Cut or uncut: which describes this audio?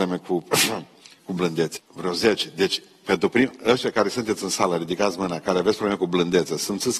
cut